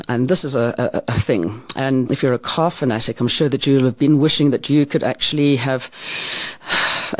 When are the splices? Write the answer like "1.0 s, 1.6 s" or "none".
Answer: 2.1 s